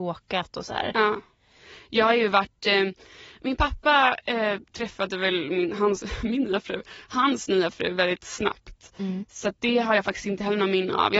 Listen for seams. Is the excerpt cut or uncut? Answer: cut